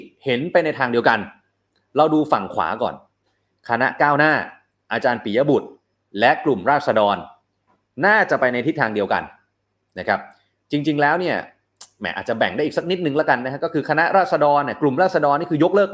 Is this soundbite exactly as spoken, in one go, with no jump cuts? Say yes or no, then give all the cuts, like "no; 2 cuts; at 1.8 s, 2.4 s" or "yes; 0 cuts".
yes; 0 cuts